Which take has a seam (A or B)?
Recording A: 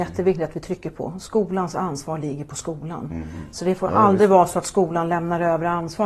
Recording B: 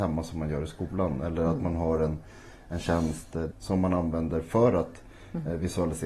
B